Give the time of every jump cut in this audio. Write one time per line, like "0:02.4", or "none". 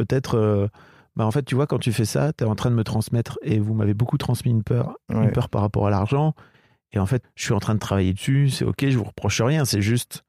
0:07.2